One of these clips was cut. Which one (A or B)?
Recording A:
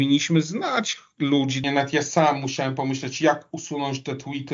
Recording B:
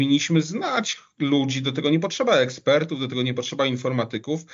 A